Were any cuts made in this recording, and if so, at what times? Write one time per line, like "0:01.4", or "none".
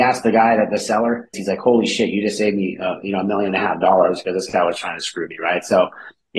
0:01.3